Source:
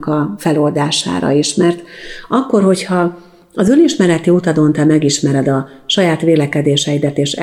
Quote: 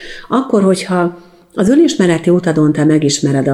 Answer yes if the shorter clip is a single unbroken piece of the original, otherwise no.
yes